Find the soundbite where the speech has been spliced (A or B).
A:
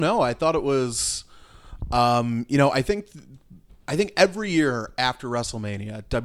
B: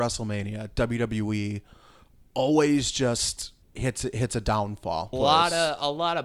B